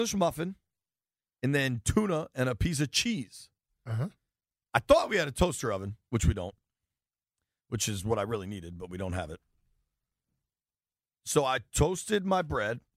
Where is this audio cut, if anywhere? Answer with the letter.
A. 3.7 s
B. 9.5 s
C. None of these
C